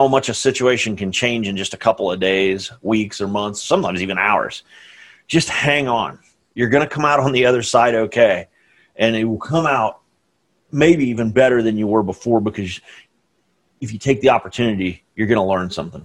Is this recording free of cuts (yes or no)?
yes